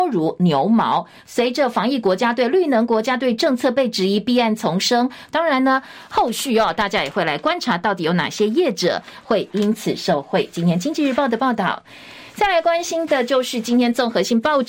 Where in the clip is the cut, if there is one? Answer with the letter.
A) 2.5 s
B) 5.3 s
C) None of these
B